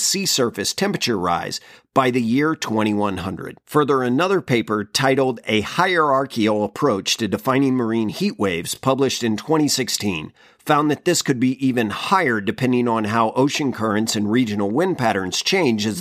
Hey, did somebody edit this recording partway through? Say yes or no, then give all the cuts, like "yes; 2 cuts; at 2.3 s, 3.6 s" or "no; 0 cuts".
no; 0 cuts